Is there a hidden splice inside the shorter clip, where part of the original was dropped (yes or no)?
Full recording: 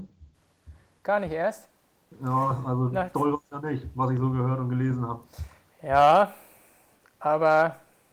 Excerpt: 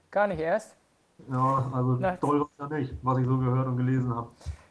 no